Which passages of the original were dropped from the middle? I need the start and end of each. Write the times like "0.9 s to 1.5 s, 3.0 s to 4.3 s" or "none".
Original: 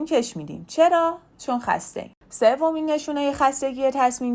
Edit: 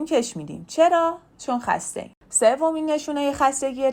none